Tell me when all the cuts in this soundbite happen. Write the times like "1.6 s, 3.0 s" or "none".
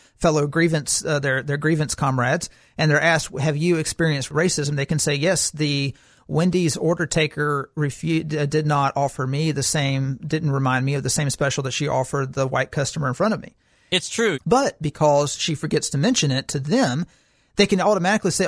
14.3 s